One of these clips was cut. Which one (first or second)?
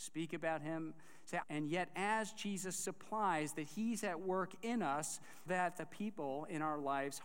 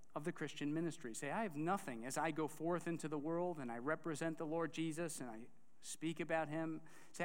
first